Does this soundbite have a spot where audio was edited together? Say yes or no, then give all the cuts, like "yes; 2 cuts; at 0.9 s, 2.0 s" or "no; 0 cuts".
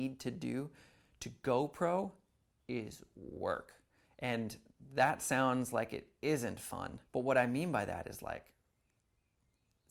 yes; 2 cuts; at 4.0 s, 7.1 s